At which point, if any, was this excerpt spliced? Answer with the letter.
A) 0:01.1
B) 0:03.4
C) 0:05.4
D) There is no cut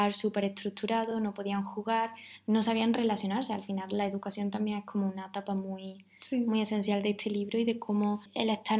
D